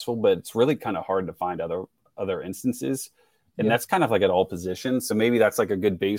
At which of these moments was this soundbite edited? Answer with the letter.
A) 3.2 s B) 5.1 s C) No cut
C